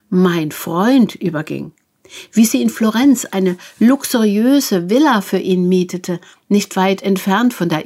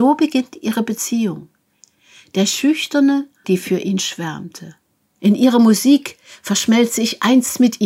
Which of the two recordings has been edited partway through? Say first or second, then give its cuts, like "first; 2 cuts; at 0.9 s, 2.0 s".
second; 2 cuts; at 3.4 s, 5.2 s